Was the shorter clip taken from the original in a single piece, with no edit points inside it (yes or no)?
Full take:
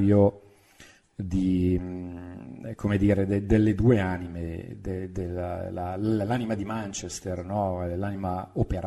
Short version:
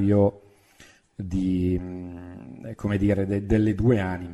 yes